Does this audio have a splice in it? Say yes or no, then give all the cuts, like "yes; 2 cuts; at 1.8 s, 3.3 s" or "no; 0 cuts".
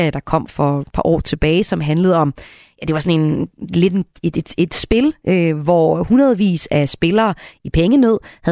no; 0 cuts